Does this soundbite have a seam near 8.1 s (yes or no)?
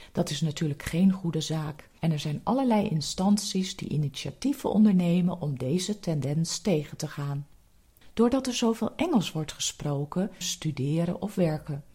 no